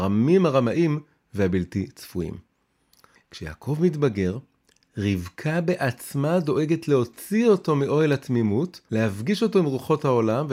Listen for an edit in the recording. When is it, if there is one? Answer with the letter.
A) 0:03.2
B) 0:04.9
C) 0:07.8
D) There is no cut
A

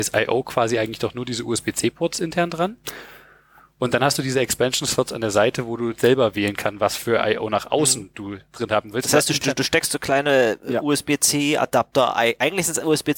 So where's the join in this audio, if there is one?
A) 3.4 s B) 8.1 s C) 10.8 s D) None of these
D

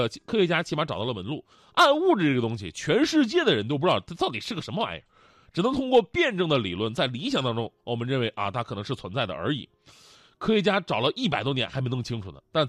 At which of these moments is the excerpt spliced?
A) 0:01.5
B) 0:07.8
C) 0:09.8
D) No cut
D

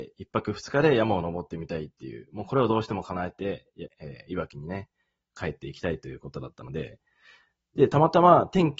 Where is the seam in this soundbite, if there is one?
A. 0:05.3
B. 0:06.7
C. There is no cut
C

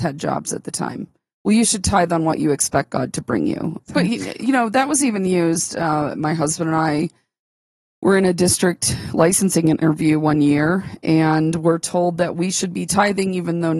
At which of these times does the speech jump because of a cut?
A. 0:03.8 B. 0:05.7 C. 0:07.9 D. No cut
A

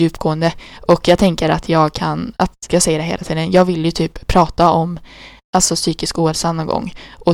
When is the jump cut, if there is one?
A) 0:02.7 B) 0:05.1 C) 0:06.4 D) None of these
A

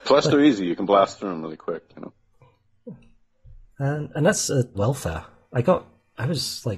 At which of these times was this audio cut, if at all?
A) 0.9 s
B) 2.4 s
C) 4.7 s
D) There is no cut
C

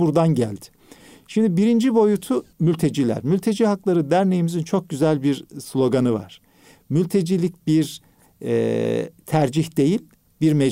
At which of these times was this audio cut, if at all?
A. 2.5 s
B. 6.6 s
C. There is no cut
A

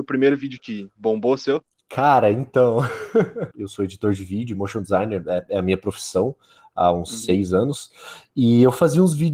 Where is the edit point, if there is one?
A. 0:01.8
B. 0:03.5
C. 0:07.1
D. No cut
B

